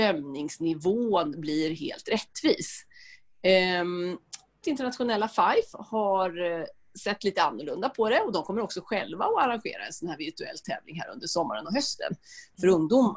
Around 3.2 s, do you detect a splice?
no; 1 cut; at 4.6 s

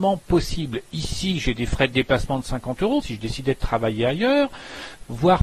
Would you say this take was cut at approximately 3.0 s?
yes; 1 cut; at 3.0 s

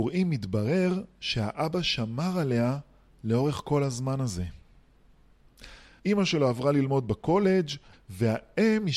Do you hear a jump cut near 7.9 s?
yes; 2 cuts; at 6.0 s, 7.9 s

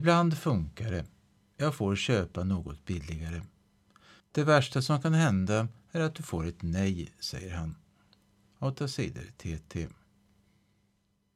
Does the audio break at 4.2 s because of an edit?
yes; 1 cut; at 4.2 s

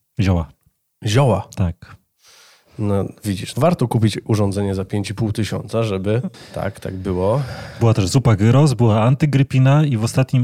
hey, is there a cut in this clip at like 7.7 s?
no; 2 cuts; at 3.5 s, 6.3 s

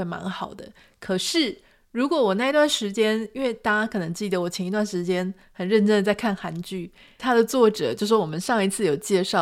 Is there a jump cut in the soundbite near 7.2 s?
yes; 1 cut; at 7.2 s

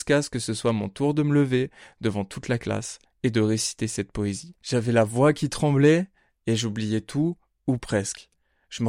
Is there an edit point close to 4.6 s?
no; 0 cuts

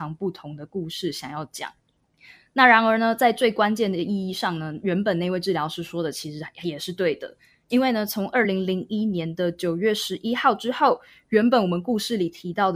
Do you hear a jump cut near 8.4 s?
no; 0 cuts

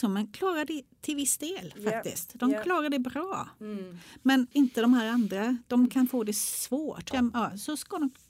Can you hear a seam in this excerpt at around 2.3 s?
no; 2 cuts; at 4.5 s, 7.1 s

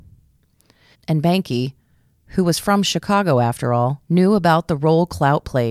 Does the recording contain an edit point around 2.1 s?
no; 2 cuts; at 0.9 s, 4.0 s

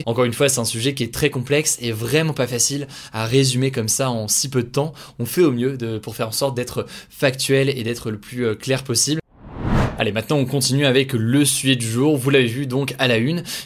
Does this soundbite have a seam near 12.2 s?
no; 0 cuts

